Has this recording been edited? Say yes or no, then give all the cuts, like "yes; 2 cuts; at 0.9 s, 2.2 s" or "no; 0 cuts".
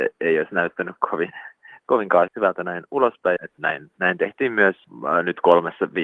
yes; 2 cuts; at 2.3 s, 3.4 s